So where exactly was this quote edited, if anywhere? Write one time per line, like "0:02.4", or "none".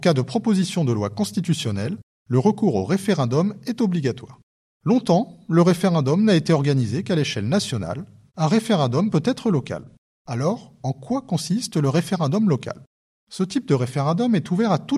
0:08.3